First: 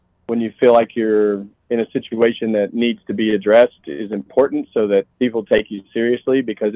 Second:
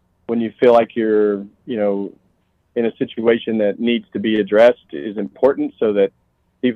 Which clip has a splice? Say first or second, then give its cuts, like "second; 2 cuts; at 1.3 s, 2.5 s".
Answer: first; 2 cuts; at 1.5 s, 5.1 s